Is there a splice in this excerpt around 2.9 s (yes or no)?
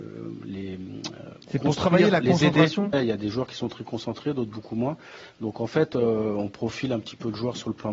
yes